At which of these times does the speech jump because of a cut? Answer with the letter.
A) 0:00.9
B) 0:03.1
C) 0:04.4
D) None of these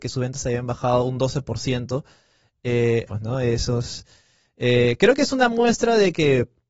B